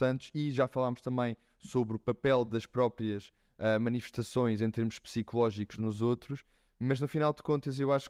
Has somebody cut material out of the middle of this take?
yes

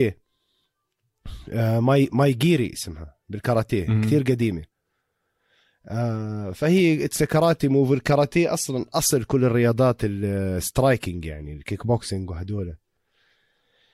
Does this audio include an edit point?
no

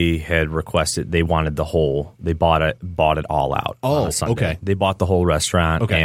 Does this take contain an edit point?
no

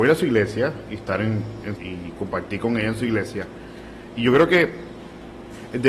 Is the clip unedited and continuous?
no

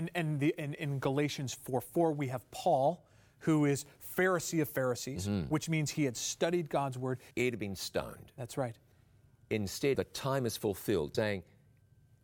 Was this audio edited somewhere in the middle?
yes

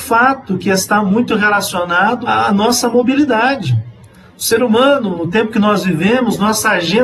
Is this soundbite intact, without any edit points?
no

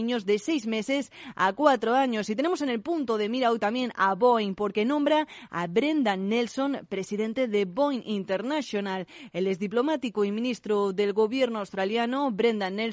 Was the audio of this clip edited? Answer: no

